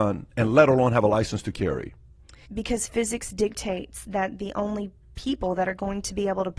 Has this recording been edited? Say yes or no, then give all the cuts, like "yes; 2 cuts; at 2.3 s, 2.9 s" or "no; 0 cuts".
yes; 1 cut; at 2.5 s